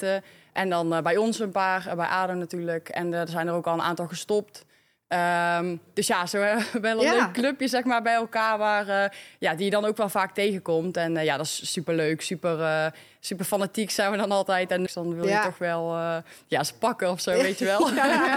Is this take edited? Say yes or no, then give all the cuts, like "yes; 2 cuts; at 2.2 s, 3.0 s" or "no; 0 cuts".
yes; 1 cut; at 14.9 s